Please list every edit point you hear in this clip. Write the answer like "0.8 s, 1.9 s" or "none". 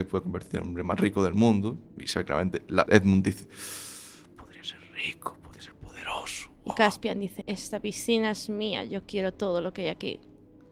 2.9 s, 7.4 s